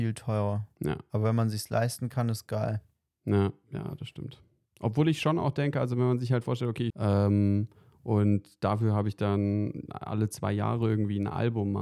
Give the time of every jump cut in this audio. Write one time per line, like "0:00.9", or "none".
0:06.9